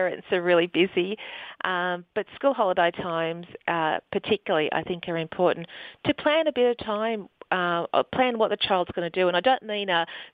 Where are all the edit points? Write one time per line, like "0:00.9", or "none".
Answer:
none

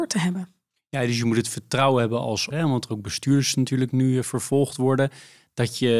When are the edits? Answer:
0:02.5

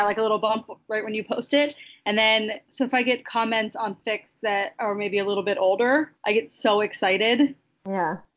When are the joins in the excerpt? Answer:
0:02.7
0:06.2

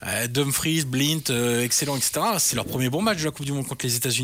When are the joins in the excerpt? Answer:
none

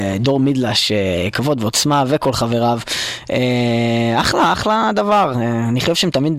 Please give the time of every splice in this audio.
none

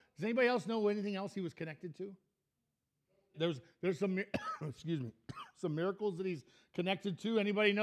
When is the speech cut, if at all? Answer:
0:03.3

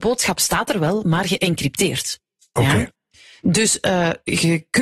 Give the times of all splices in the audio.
none

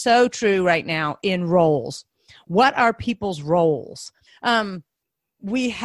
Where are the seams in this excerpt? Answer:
0:04.3

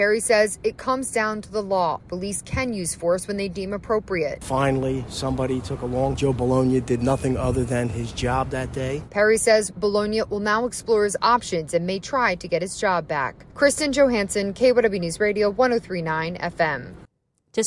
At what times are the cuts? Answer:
0:06.1
0:09.1

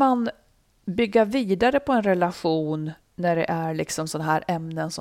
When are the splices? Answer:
none

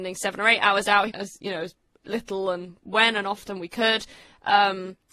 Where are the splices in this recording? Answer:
0:01.1

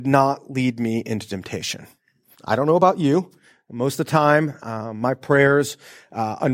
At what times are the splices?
0:02.3

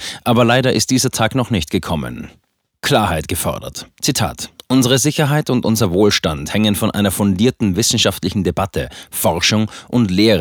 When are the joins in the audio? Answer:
none

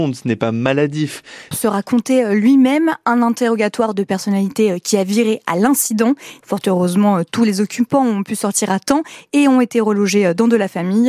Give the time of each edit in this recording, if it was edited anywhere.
0:01.5
0:06.4

